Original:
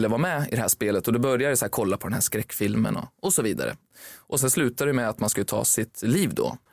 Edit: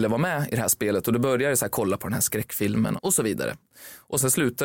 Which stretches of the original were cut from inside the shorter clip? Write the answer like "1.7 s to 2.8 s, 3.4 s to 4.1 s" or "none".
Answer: 3.0 s to 3.1 s

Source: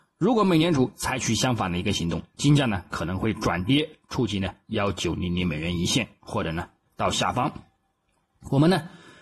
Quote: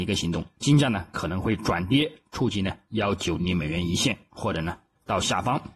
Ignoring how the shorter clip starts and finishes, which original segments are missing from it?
5.2 s to 5.3 s

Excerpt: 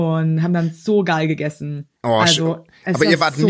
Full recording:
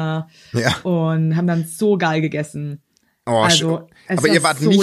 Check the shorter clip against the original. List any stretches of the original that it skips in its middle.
2.9 s to 3.2 s

